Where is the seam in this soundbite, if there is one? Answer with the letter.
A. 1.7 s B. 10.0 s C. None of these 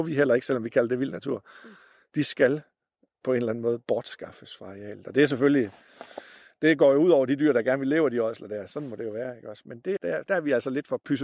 B